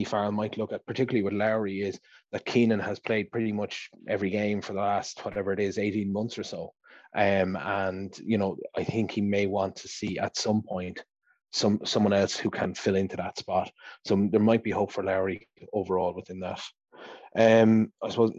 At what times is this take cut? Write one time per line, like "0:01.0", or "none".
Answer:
none